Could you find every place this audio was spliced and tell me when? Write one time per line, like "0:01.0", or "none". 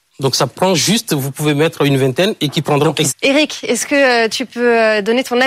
0:03.1